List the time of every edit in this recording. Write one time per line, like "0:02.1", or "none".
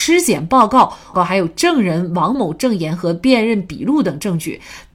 0:01.1
0:02.3